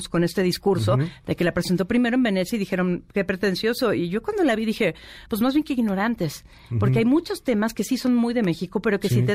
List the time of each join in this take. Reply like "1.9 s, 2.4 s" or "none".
none